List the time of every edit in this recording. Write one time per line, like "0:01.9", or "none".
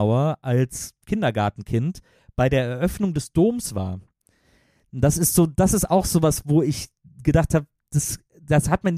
none